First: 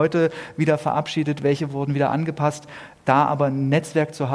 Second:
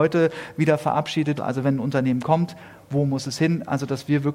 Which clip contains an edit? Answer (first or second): second